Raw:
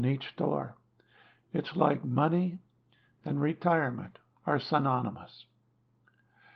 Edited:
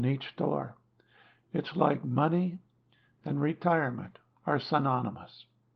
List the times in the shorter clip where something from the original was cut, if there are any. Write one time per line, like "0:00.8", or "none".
none